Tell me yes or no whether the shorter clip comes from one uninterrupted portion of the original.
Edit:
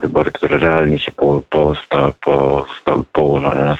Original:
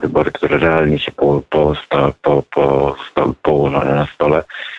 no